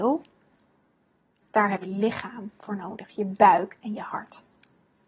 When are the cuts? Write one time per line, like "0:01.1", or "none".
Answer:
0:01.8